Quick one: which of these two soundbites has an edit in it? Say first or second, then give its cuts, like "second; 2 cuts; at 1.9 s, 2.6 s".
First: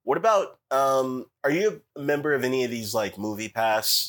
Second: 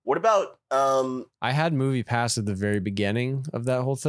second; 1 cut; at 1.3 s